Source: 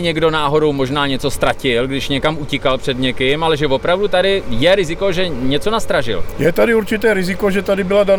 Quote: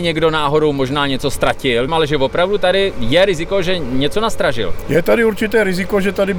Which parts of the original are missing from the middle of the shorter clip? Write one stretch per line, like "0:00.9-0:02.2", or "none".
0:01.9-0:03.4